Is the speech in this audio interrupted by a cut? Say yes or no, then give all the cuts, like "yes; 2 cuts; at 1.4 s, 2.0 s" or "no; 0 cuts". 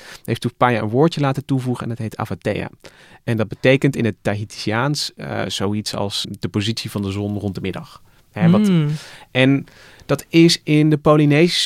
yes; 1 cut; at 6.2 s